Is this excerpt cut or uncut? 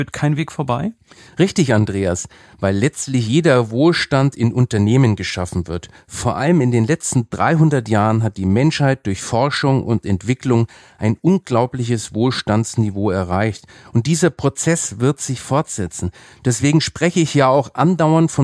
uncut